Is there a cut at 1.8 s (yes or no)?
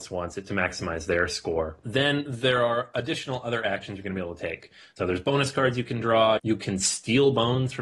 no